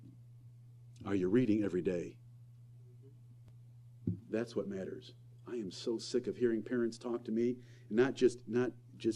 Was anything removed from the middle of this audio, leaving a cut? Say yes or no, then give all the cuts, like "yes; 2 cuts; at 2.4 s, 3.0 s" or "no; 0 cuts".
no; 0 cuts